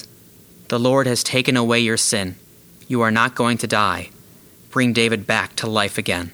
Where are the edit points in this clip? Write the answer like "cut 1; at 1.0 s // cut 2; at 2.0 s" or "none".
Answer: none